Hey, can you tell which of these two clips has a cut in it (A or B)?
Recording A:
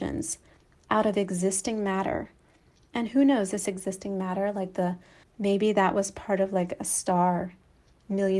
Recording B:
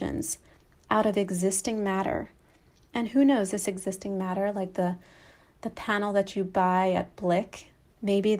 A